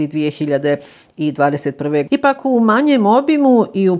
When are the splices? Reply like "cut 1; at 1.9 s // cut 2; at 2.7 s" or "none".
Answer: cut 1; at 2.1 s